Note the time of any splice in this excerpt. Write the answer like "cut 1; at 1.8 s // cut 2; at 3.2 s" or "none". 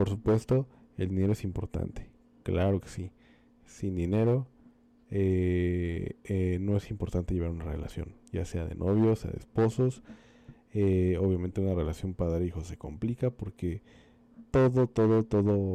none